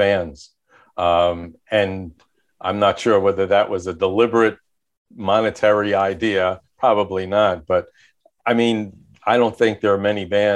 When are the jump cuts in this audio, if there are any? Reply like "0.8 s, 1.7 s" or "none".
none